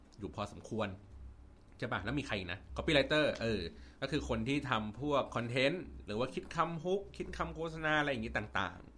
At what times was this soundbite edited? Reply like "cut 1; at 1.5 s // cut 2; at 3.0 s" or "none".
cut 1; at 2.7 s